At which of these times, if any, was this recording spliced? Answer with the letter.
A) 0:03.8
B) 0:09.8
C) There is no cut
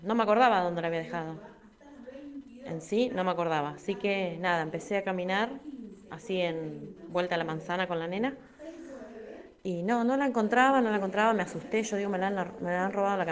C